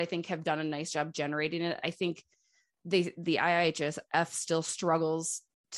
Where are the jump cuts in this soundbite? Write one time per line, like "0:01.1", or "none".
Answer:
none